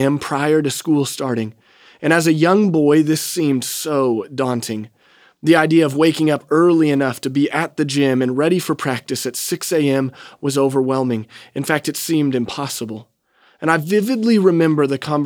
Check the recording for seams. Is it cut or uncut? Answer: uncut